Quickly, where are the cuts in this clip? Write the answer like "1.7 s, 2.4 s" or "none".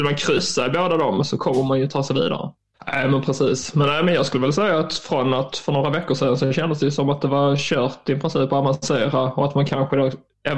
2.7 s